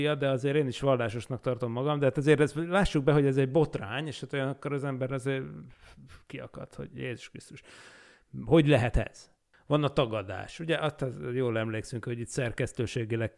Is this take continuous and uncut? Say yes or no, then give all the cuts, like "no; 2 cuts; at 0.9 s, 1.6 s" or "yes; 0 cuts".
no; 1 cut; at 9.5 s